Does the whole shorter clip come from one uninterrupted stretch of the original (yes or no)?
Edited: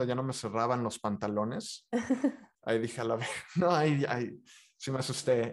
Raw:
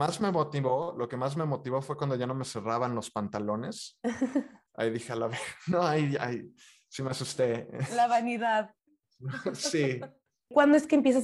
yes